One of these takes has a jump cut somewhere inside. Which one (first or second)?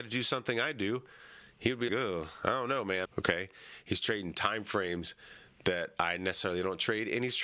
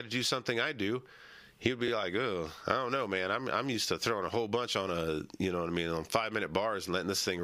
first